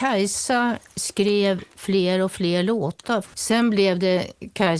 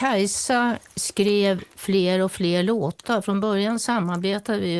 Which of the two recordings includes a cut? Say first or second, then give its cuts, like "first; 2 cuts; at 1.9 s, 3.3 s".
first; 1 cut; at 3.2 s